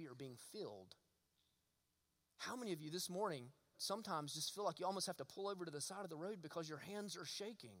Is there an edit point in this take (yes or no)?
yes